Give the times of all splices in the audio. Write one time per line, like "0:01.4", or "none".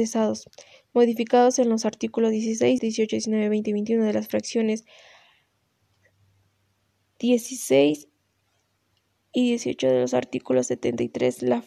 0:02.8